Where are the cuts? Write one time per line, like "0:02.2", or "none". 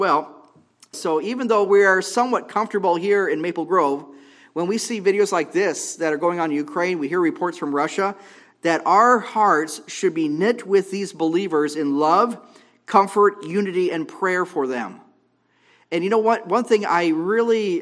0:00.9